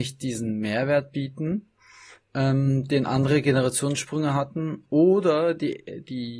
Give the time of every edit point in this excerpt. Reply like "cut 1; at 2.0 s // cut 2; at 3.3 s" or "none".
none